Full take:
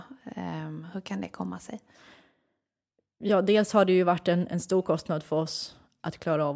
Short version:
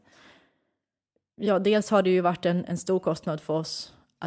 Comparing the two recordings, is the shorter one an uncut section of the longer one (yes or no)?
yes